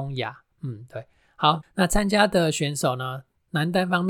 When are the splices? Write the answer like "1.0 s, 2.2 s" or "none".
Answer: 1.6 s